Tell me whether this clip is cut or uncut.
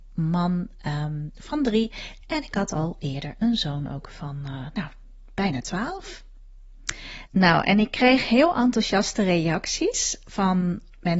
cut